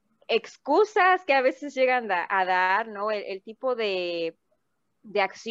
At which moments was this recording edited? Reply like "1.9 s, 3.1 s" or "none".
none